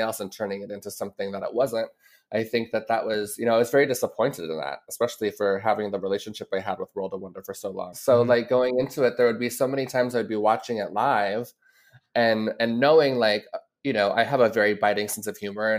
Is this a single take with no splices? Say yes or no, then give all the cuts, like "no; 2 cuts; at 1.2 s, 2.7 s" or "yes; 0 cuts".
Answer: no; 1 cut; at 7.9 s